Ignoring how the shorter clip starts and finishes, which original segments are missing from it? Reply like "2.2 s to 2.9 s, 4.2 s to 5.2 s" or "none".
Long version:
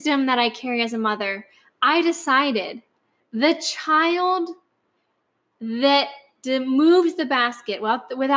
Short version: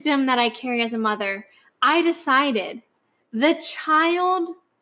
none